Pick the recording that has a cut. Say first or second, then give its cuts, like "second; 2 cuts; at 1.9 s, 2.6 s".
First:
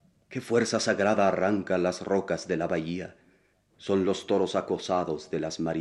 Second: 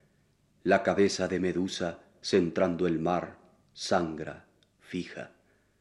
first; 1 cut; at 3.7 s